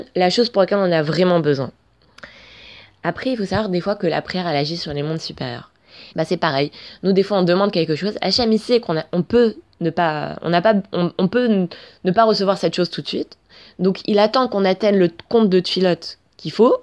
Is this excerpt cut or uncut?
cut